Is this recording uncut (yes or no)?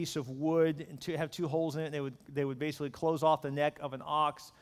yes